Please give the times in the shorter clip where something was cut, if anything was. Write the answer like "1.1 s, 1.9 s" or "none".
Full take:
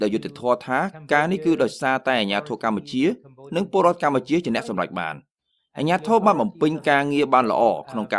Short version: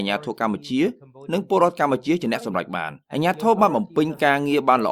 3.0 s